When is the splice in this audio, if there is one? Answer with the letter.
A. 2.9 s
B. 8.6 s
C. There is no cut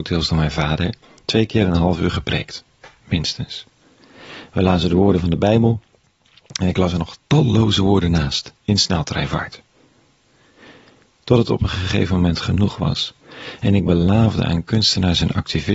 B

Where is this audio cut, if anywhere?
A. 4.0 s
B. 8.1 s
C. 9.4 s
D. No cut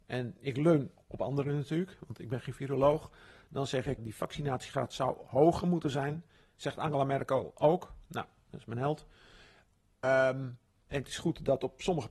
A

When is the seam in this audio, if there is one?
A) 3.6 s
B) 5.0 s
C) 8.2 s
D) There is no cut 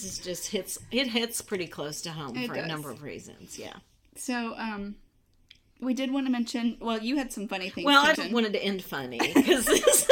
C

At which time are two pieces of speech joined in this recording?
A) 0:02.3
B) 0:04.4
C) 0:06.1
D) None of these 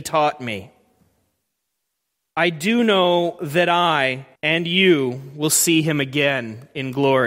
B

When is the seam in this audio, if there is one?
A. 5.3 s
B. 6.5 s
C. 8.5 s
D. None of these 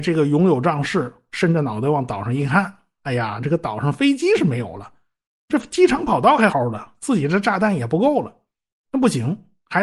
B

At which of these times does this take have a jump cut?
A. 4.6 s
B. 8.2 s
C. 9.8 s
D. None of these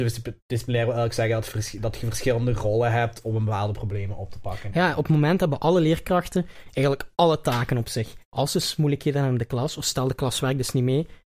B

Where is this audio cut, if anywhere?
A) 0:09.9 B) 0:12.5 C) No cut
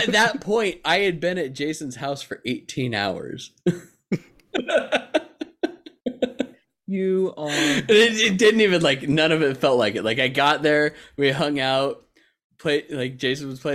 C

